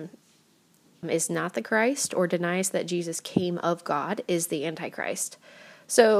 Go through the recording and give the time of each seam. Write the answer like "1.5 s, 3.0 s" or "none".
1.0 s